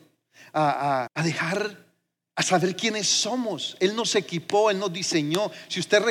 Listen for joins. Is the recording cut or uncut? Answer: cut